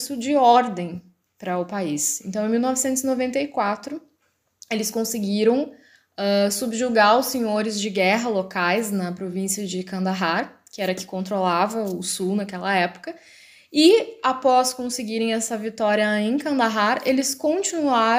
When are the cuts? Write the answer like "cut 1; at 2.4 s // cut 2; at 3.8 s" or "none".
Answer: none